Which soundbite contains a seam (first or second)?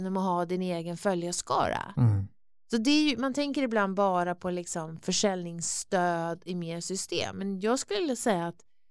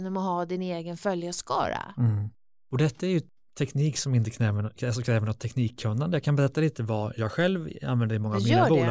second